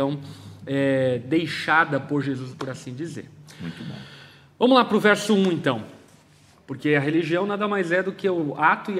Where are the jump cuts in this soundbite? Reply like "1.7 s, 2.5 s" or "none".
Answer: 2.5 s, 6.5 s